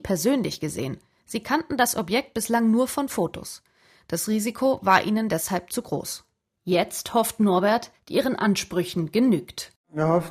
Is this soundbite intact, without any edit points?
no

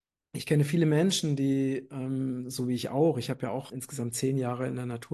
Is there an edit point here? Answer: yes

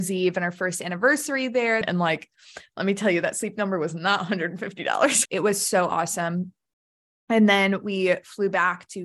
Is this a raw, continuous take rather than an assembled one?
no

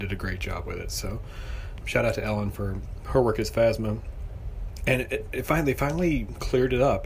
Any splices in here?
yes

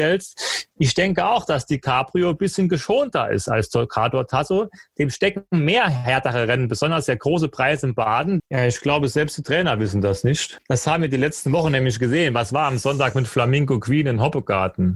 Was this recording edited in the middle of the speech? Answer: yes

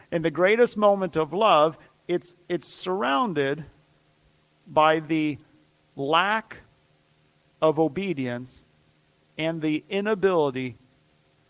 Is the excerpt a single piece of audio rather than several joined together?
yes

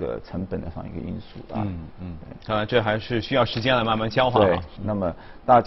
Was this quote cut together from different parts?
yes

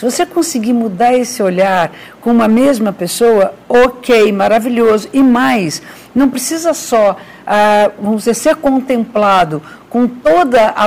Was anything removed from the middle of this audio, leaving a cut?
no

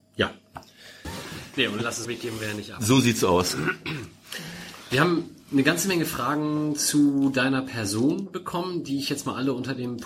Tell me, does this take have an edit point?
yes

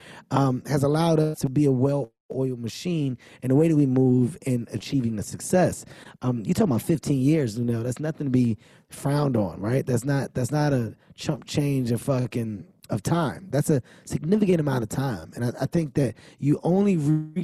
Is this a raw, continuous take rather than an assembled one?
yes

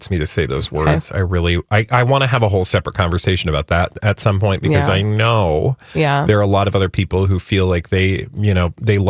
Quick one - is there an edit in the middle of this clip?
no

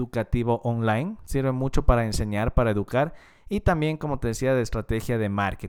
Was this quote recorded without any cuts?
yes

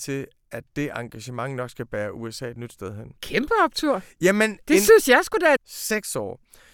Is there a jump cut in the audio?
yes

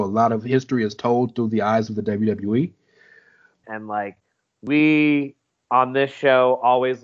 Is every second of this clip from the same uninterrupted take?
no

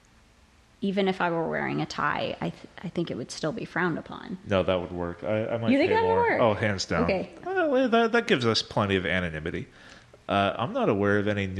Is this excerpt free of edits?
no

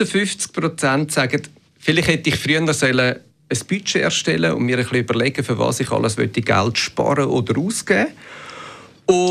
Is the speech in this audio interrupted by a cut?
no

